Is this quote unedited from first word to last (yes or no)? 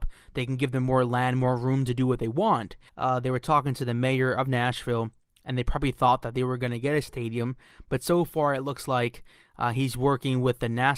no